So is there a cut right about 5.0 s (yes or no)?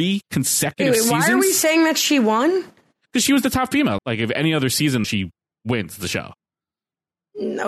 yes